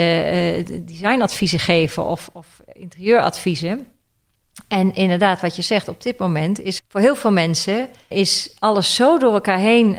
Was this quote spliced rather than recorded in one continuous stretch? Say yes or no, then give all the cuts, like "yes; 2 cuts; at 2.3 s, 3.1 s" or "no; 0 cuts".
yes; 2 cuts; at 6.8 s, 8.1 s